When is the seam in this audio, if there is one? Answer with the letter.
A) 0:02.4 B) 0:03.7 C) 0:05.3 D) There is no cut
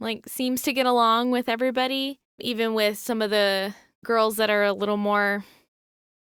A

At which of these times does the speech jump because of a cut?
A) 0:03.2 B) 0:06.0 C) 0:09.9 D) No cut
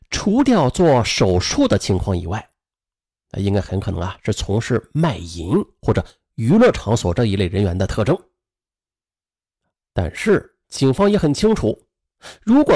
C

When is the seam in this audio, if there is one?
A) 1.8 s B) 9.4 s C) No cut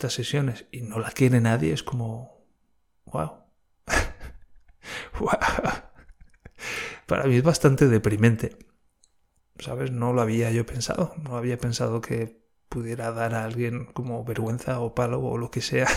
B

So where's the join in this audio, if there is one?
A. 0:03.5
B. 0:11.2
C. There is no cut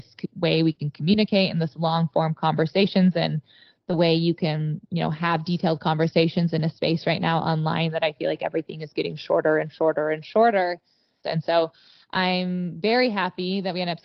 B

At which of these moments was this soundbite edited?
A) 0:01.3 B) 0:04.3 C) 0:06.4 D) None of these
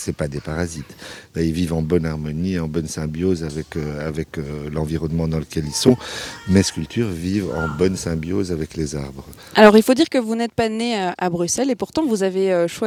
D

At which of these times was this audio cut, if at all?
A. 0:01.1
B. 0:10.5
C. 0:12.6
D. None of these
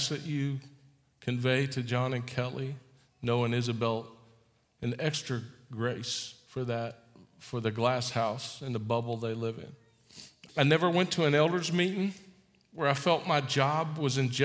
B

